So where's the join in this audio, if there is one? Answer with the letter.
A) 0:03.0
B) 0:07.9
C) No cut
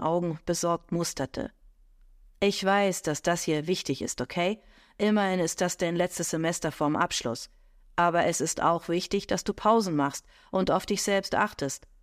C